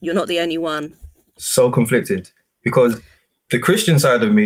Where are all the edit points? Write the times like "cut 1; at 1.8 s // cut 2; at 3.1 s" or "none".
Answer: none